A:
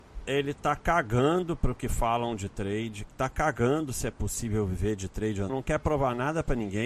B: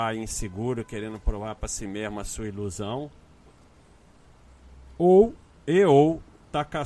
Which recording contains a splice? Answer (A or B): A